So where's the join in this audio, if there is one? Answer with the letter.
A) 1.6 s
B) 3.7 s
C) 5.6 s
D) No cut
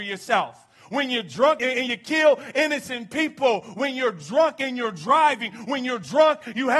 A